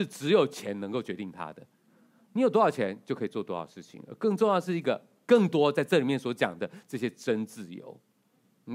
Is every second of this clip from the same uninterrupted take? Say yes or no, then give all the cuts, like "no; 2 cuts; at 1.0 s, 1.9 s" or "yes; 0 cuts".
yes; 0 cuts